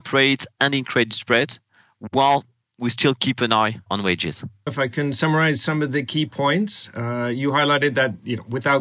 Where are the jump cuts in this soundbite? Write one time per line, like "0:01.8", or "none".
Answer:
0:04.7